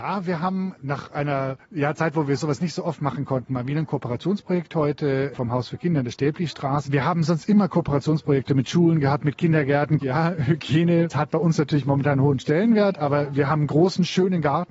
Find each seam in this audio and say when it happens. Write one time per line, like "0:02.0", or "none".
0:06.8
0:10.0